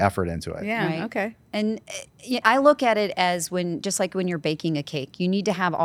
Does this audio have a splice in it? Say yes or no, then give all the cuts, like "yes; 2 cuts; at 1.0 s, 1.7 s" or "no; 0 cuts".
yes; 1 cut; at 2.4 s